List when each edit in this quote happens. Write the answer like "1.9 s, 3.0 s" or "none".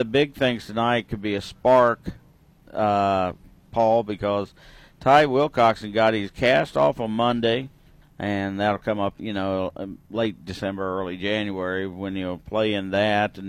8.0 s, 9.2 s

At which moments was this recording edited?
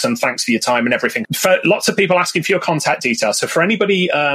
1.2 s

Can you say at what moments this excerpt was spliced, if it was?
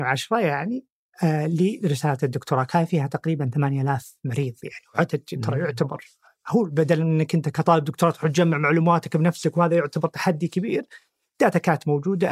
none

